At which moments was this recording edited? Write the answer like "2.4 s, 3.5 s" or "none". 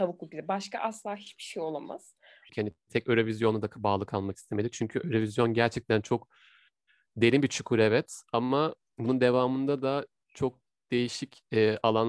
2.5 s